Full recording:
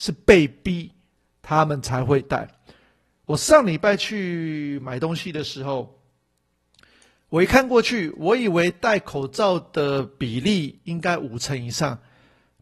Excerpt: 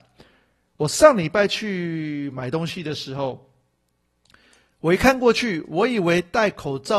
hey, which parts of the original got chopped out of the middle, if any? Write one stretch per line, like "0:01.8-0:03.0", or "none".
none

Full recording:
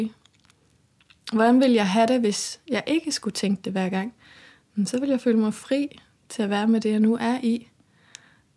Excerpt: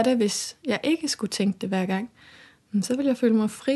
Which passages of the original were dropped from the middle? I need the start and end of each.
none

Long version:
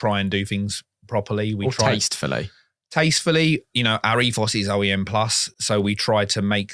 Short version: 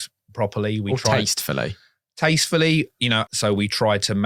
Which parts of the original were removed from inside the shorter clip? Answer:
0:04.0-0:05.5

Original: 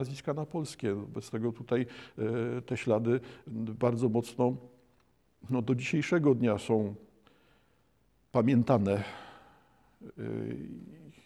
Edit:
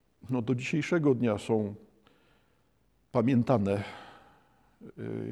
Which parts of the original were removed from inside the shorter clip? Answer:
none

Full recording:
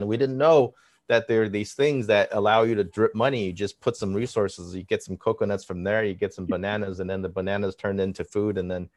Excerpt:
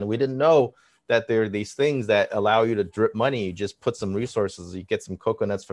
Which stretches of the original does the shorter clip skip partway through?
none

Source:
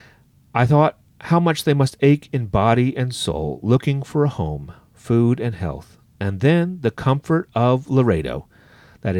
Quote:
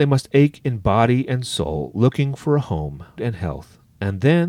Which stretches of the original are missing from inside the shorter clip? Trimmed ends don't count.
0:04.9-0:05.4

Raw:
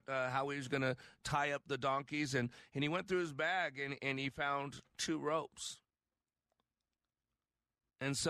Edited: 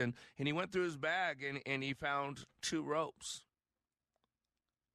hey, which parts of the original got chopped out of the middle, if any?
none

